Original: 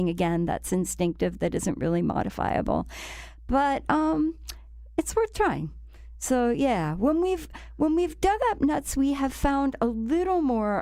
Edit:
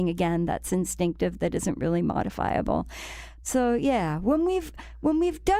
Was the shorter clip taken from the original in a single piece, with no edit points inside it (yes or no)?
no